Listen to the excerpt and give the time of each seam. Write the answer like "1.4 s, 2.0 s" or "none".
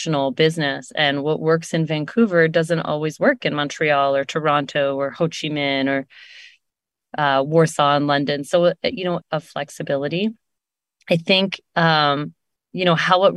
9.2 s